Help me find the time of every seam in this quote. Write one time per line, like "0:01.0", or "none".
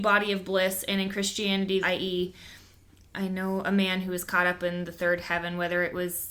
0:01.8

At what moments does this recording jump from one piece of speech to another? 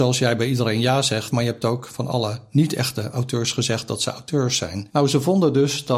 0:01.3
0:04.9

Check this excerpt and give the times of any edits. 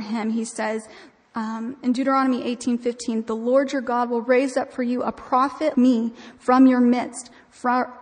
0:05.7

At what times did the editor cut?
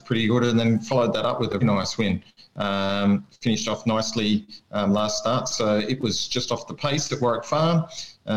0:01.6

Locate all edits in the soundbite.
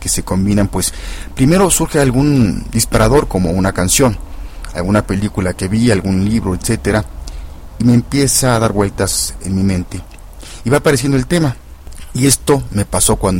none

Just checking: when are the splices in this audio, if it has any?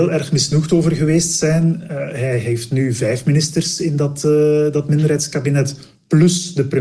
none

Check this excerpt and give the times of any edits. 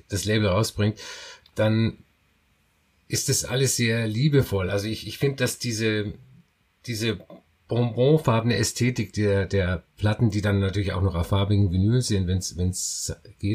none

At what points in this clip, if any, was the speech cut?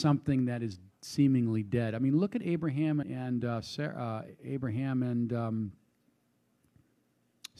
0:03.0

